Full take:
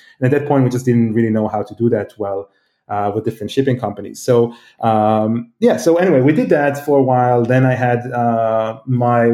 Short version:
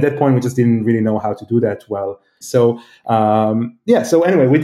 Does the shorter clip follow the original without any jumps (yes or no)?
no